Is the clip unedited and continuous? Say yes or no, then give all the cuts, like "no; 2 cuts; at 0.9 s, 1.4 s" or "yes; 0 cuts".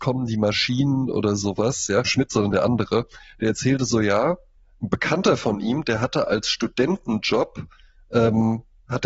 no; 1 cut; at 2.0 s